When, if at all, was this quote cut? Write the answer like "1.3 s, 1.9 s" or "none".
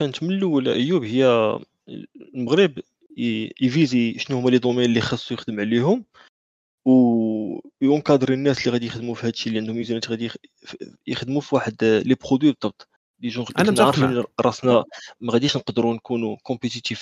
15.2 s